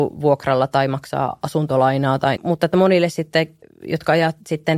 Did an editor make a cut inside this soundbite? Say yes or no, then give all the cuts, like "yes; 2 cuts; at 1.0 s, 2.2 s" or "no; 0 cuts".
yes; 2 cuts; at 2.4 s, 3.6 s